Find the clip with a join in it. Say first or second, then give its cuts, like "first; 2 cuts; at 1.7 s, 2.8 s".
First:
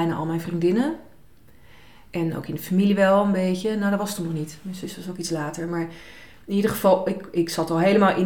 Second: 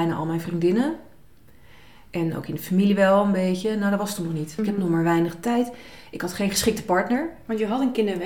second; 1 cut; at 4.6 s